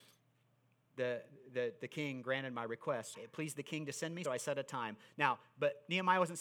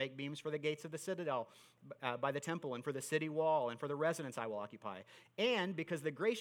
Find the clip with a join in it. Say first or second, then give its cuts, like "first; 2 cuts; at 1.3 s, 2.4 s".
first; 2 cuts; at 3.1 s, 4.2 s